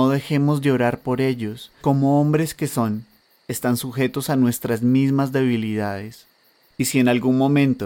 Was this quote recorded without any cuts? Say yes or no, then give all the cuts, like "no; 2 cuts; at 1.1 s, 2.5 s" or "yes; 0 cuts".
no; 1 cut; at 1.8 s